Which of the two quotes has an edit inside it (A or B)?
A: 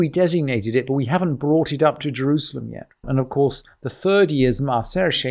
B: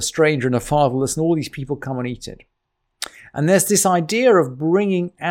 A